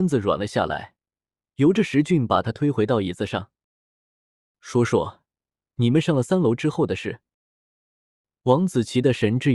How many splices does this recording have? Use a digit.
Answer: 0